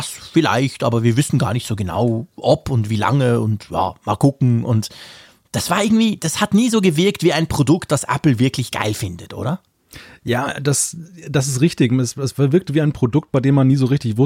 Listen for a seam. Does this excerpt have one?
no; 0 cuts

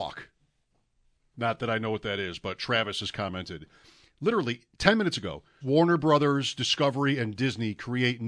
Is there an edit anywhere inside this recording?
yes; 1 cut; at 5.6 s

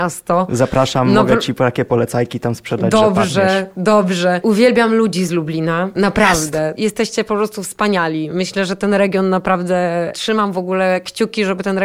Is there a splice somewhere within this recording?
no; 0 cuts

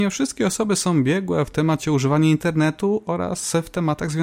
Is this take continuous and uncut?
yes; 0 cuts

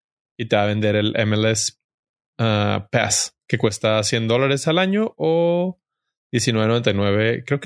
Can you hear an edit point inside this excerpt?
no; 0 cuts

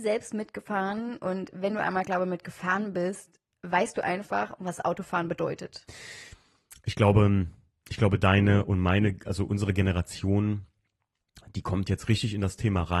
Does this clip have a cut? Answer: no; 0 cuts

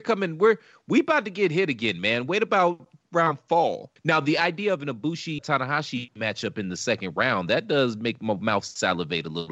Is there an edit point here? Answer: yes; 2 cuts; at 4.0 s, 5.4 s

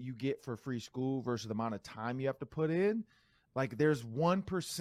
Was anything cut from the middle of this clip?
yes; 1 cut; at 3.4 s

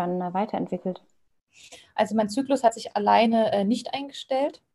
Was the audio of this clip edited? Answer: no; 0 cuts

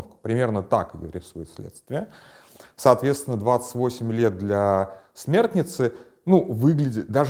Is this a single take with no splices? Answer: yes; 0 cuts

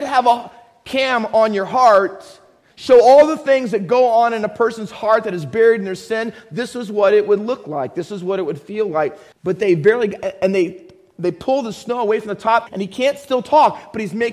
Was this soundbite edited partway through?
yes; 2 cuts; at 9.3 s, 12.7 s

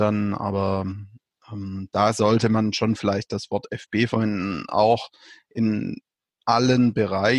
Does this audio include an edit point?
no; 0 cuts

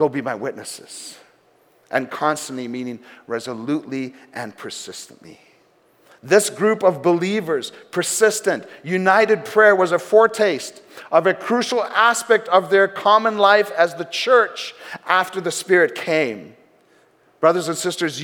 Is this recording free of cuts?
yes; 0 cuts

